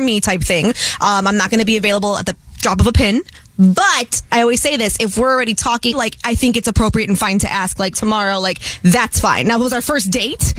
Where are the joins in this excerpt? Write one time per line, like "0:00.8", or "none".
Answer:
0:05.9
0:07.9